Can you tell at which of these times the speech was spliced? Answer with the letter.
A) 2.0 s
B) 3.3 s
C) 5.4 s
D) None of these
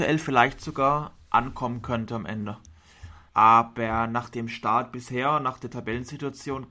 B